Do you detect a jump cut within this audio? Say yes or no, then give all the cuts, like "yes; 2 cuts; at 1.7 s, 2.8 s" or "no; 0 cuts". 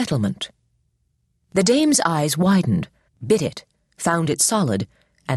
yes; 1 cut; at 3.1 s